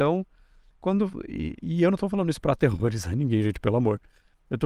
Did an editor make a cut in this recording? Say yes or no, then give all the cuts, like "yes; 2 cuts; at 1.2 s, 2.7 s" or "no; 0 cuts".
no; 0 cuts